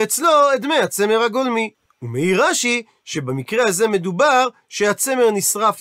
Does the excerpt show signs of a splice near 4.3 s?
no; 1 cut; at 1.9 s

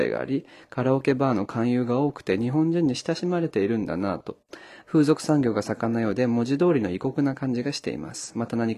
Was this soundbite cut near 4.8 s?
yes; 1 cut; at 4.8 s

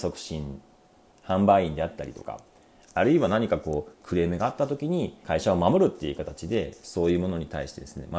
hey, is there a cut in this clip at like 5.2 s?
yes; 1 cut; at 5.2 s

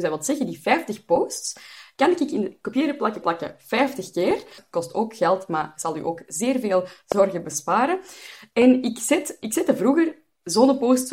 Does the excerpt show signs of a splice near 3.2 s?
yes; 2 cuts; at 3.2 s, 4.6 s

